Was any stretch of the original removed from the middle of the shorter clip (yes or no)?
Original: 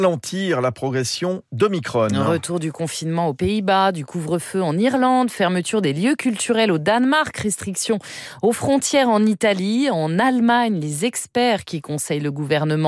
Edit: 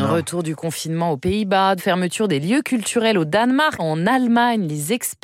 yes